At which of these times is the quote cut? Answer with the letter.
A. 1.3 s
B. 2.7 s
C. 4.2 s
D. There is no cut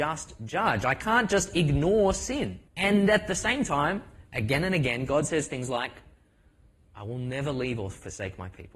B